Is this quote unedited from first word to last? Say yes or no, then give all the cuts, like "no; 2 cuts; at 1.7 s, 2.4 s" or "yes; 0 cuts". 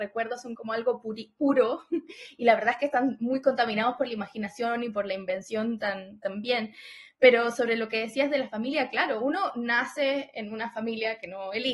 yes; 0 cuts